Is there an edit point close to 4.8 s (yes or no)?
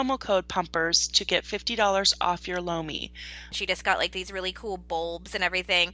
no